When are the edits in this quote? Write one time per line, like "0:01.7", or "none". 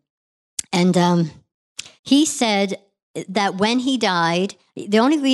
0:02.0